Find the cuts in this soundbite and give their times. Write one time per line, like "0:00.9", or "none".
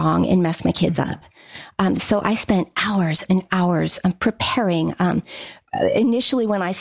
none